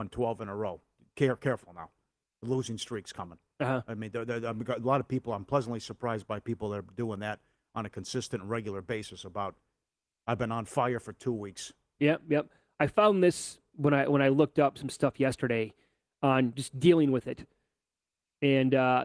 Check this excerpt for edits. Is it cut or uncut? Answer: cut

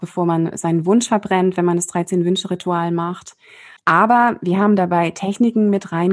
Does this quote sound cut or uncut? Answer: cut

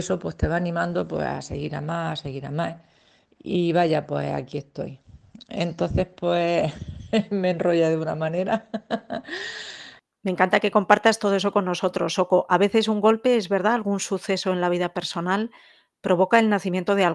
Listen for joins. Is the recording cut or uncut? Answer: uncut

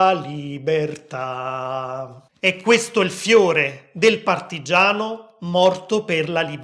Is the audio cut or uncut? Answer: cut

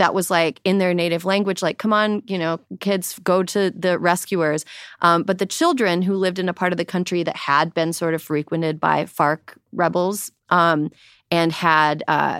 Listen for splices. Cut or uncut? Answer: uncut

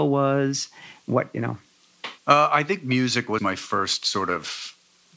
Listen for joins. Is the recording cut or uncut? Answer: cut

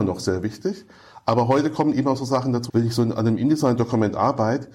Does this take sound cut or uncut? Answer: cut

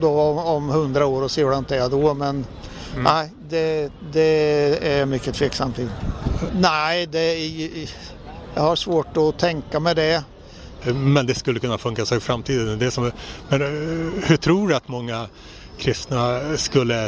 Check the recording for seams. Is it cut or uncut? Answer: cut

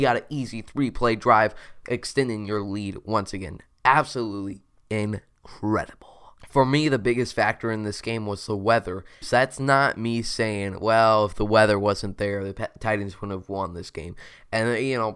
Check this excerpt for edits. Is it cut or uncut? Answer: cut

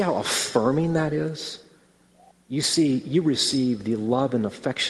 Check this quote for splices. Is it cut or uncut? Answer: cut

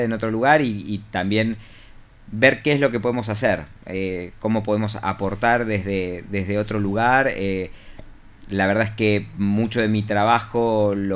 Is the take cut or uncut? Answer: uncut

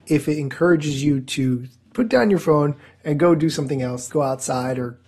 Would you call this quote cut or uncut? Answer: cut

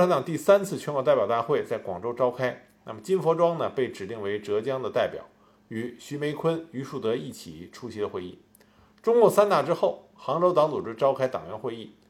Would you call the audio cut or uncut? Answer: uncut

